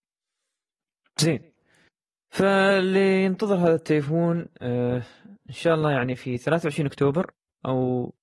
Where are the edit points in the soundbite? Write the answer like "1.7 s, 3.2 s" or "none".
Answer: none